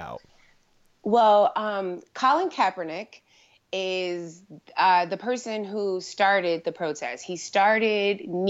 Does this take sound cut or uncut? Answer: uncut